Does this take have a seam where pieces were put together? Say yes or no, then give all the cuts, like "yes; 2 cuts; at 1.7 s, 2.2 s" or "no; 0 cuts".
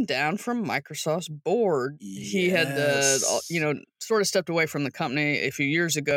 no; 0 cuts